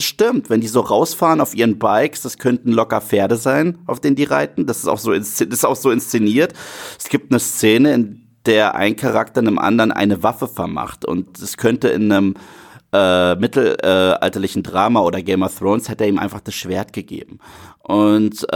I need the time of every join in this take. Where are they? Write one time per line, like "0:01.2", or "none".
none